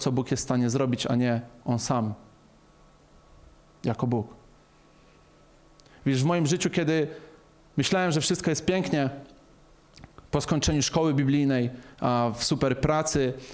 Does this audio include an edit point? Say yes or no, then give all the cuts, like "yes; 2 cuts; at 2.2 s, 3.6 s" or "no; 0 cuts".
no; 0 cuts